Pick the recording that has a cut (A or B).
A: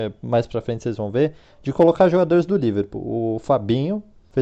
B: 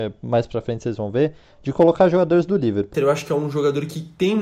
B